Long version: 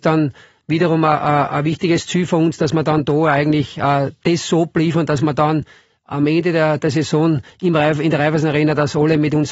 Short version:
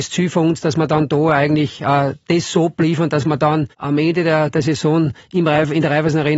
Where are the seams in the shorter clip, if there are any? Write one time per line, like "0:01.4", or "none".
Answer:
0:03.7

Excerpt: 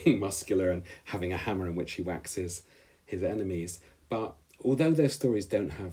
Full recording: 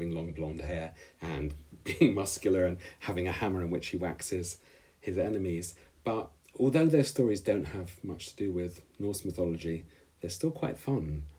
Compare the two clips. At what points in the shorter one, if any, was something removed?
none

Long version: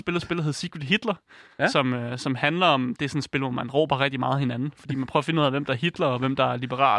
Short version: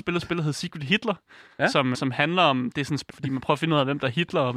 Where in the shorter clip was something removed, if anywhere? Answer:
0:01.9
0:03.1

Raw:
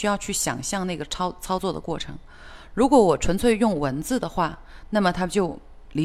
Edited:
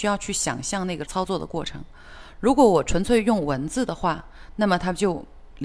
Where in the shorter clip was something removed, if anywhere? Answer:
0:01.1

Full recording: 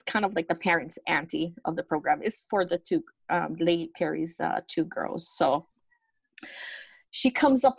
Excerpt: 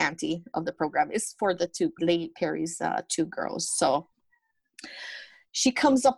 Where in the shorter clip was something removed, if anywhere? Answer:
0:02.0

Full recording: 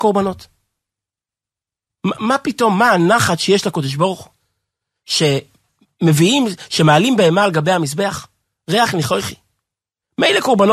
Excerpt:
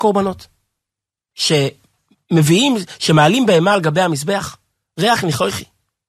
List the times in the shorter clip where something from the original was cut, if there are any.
0:01.3

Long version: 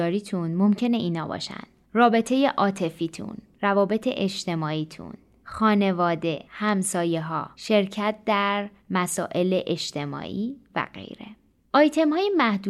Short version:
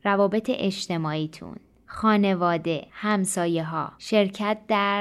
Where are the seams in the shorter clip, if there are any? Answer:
none

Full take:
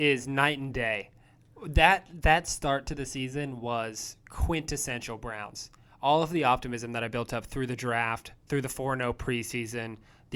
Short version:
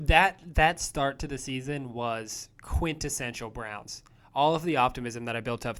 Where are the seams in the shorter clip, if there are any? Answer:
none

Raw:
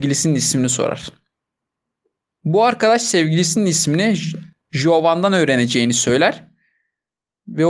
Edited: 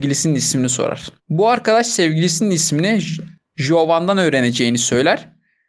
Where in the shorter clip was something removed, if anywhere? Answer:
0:01.2

